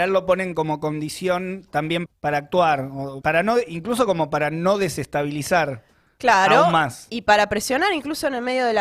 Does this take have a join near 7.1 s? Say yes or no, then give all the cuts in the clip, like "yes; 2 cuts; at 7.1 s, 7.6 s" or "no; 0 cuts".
no; 2 cuts; at 2.1 s, 3.2 s